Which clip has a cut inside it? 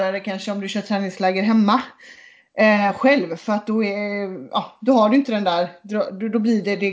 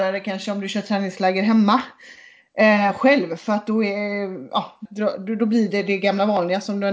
second; 1 cut; at 4.9 s

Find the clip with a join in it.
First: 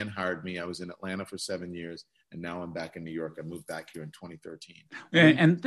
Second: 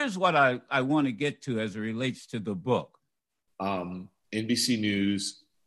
second; 1 cut; at 3.5 s

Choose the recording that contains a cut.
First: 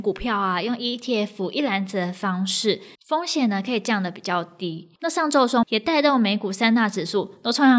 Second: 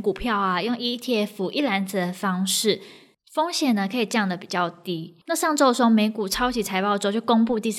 first; 2 cuts; at 3.0 s, 5.6 s

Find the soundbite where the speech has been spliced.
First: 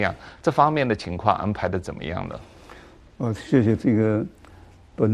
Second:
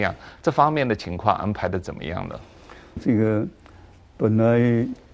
second; 1 cut; at 3.0 s

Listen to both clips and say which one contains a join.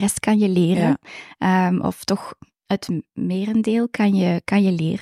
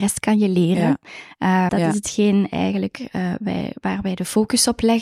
second; 1 cut; at 1.7 s

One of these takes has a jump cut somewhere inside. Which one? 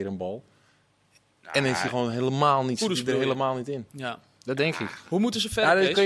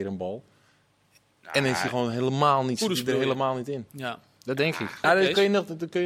second; 1 cut; at 5.0 s

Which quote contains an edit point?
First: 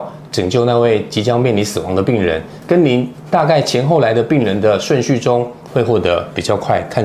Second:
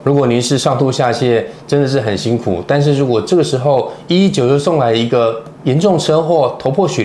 first; 2 cuts; at 2.6 s, 5.7 s

